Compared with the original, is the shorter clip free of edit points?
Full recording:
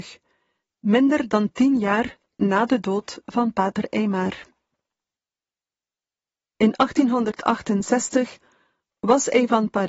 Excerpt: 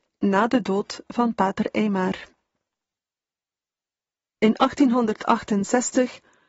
yes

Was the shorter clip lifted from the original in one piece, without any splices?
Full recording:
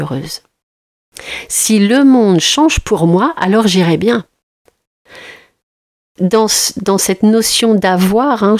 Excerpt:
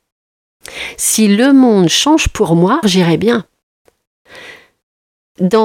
no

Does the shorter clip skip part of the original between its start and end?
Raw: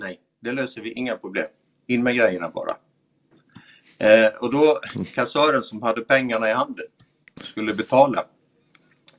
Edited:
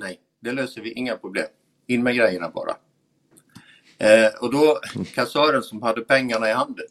no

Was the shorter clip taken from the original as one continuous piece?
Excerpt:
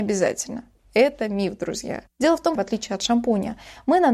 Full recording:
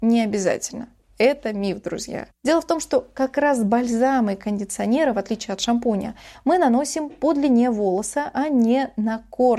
no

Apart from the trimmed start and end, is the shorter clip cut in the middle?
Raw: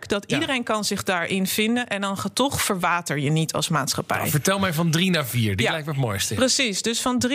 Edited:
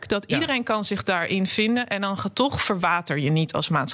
no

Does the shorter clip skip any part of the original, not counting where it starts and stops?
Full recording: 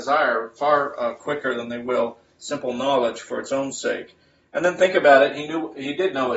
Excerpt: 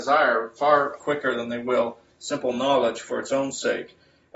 yes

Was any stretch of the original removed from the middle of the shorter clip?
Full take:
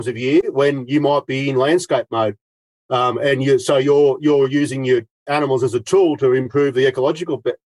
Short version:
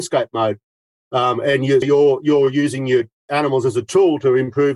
yes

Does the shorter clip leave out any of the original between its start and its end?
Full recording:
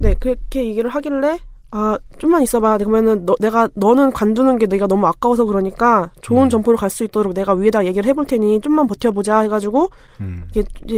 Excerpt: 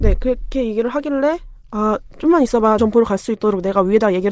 yes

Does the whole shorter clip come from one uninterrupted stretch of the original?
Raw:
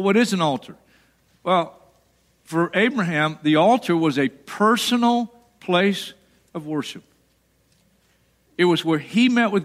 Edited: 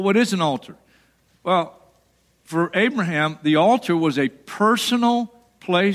yes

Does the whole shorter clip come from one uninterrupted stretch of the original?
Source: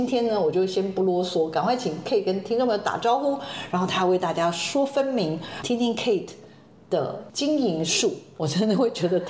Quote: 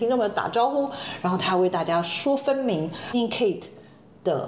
no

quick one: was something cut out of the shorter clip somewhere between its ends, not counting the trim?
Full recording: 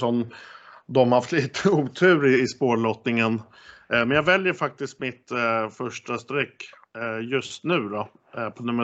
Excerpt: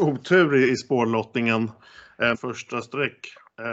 yes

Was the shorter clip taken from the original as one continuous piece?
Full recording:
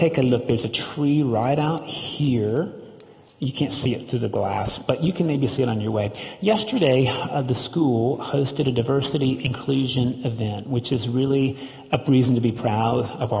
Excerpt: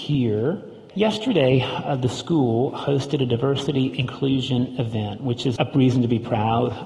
no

